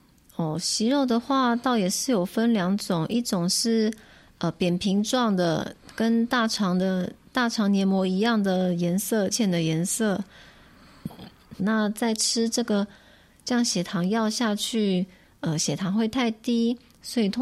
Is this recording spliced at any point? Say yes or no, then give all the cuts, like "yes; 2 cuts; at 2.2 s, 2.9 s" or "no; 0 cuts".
yes; 2 cuts; at 9.3 s, 11.6 s